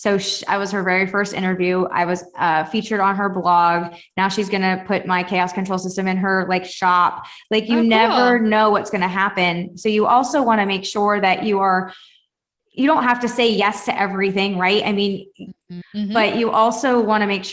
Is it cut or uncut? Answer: cut